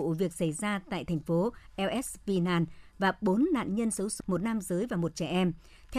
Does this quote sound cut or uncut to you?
cut